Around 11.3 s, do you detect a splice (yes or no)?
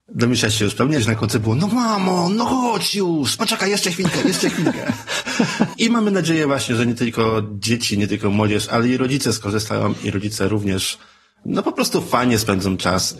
no